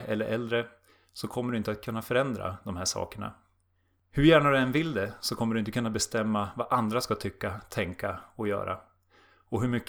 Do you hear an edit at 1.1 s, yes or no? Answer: no